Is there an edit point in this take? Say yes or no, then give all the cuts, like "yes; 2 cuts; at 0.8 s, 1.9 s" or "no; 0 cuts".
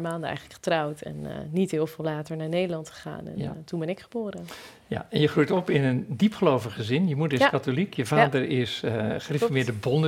no; 0 cuts